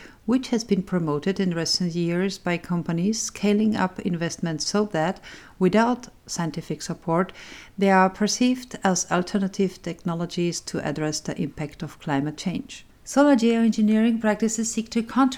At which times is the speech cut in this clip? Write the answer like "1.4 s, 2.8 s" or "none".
none